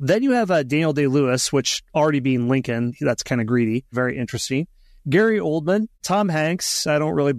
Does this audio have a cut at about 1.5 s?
no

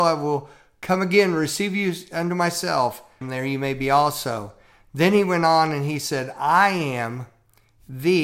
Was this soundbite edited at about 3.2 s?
yes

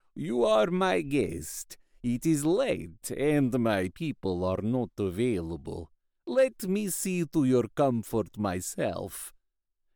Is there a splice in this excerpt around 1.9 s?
no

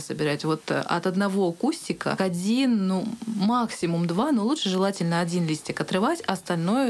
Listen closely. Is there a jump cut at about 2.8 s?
no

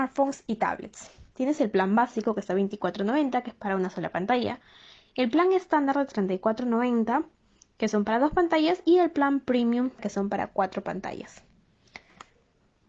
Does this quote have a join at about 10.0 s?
yes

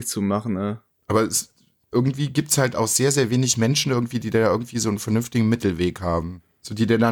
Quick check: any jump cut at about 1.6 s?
no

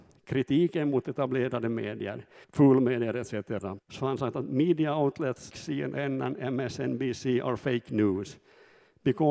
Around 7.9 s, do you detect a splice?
no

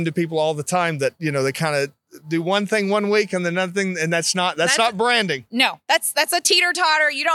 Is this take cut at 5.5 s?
no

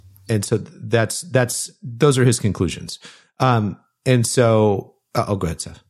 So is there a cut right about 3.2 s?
no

